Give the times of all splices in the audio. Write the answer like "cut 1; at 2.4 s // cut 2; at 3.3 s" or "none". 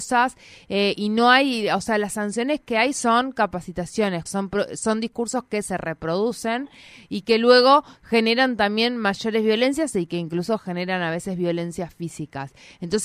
cut 1; at 4.3 s